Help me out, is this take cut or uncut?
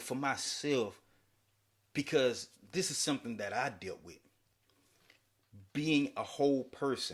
uncut